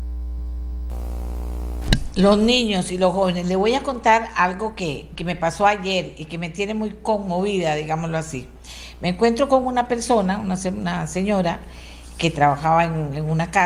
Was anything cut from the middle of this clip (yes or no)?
yes